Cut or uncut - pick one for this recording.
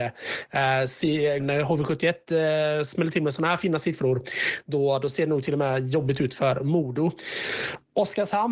cut